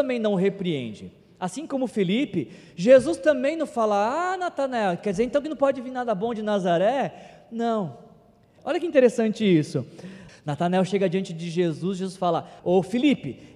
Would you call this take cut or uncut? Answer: cut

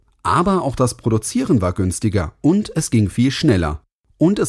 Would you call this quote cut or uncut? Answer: cut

